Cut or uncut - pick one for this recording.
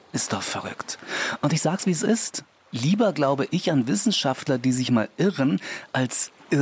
uncut